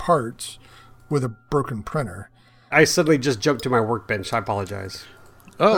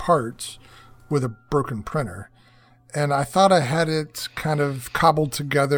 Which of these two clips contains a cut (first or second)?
first